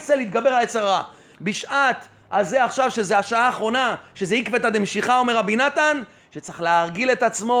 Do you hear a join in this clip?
yes; 1 cut; at 1.3 s

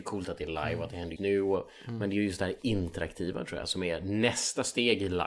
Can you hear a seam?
yes; 1 cut; at 1.2 s

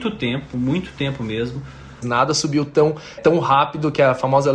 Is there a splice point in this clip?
yes; 2 cuts; at 2.0 s, 3.2 s

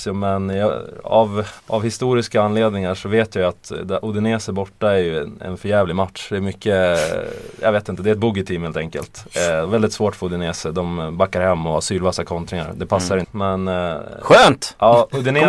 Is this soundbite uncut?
no; 2 cuts; at 1.6 s, 13.2 s

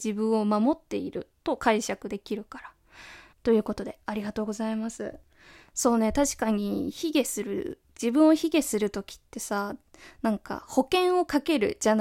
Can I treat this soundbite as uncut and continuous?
no; 1 cut; at 3.3 s

